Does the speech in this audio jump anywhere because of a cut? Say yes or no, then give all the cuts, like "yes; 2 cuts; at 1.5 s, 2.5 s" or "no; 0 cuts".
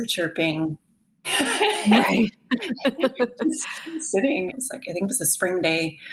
yes; 2 cuts; at 1.2 s, 4.5 s